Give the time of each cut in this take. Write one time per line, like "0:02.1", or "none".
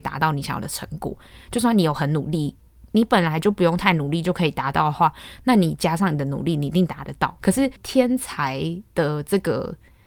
0:02.9
0:07.4